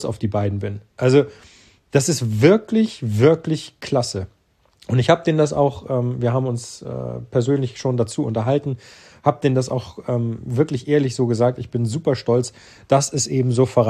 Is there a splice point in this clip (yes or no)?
no